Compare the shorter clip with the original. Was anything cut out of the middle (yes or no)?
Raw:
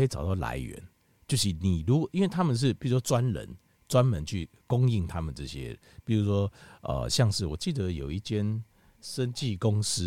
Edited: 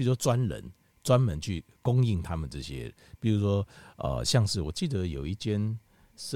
no